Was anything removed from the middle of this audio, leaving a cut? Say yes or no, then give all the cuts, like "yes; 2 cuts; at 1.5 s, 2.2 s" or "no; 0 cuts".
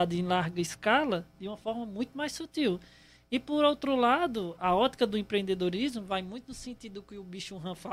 no; 0 cuts